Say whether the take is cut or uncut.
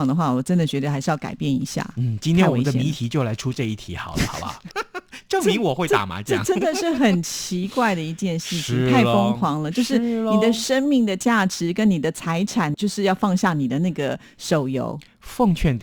cut